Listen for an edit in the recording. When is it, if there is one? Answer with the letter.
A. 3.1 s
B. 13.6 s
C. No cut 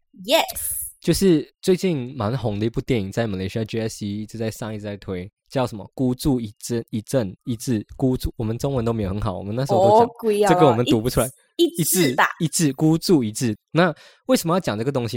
B